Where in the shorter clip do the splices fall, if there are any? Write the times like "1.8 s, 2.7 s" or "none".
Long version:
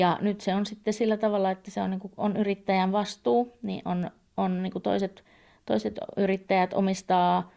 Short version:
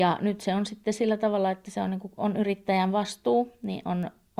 none